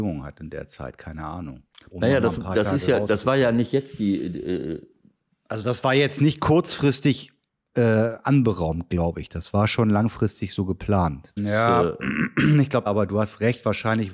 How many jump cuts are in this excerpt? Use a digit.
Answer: 2